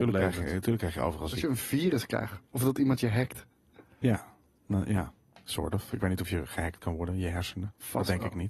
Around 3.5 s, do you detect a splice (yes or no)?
no